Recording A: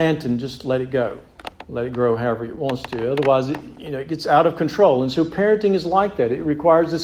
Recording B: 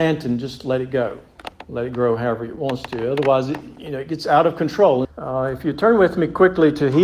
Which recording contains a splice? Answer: B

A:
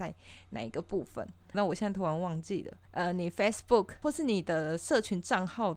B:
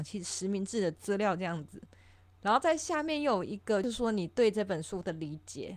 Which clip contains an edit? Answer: A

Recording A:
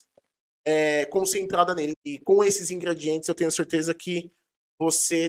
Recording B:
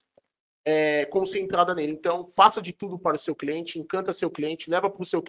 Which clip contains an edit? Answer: A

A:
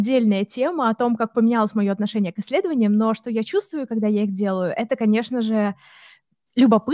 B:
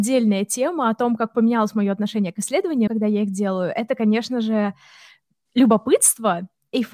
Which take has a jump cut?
B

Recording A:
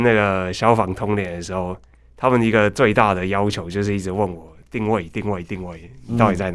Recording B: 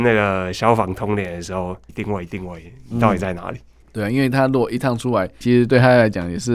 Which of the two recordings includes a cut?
B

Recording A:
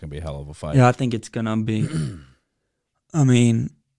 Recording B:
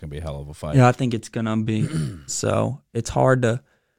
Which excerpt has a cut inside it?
B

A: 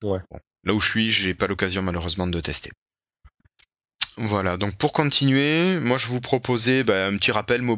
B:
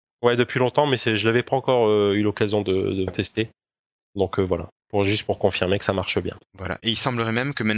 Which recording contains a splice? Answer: B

